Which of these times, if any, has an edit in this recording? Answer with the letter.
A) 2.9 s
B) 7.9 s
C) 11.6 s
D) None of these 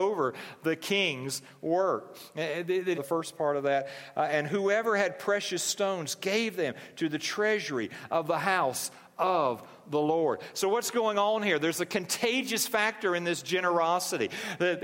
A